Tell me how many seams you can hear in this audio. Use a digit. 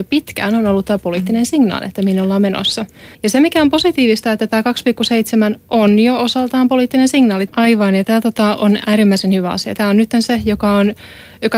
3